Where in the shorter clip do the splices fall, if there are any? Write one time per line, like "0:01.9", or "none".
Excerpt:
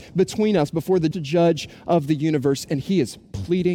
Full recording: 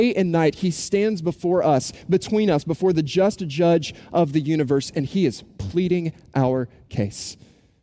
0:01.1